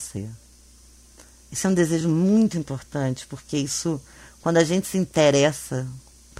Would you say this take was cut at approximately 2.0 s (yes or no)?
no